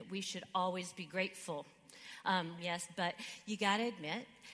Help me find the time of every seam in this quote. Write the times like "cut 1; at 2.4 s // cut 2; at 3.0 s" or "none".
cut 1; at 2.6 s